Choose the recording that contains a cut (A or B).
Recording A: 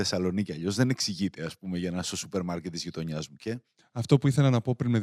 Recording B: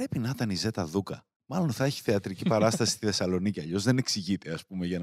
B